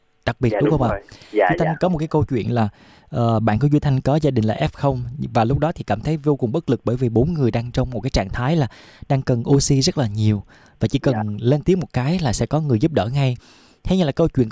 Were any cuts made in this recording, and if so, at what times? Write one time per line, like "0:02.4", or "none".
none